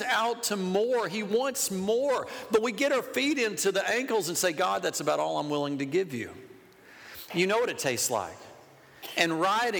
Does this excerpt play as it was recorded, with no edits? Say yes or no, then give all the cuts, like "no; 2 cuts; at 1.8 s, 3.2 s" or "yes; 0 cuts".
no; 1 cut; at 7.3 s